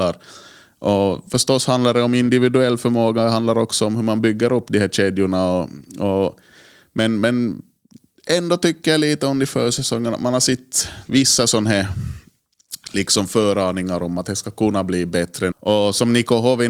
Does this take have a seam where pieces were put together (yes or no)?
yes